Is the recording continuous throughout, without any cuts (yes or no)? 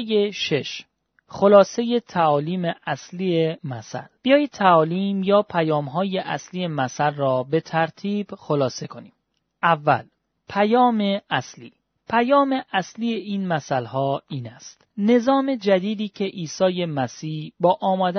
yes